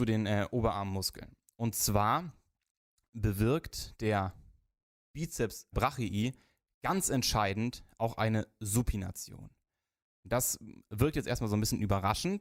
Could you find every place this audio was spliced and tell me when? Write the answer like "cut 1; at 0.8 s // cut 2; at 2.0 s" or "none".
cut 1; at 5.7 s